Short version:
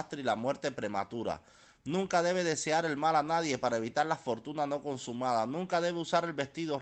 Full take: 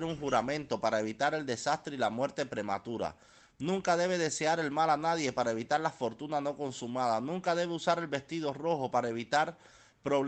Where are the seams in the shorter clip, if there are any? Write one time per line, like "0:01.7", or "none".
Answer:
none